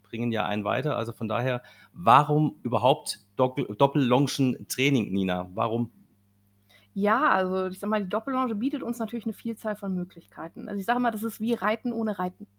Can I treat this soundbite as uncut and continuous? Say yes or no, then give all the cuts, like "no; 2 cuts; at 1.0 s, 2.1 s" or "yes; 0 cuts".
yes; 0 cuts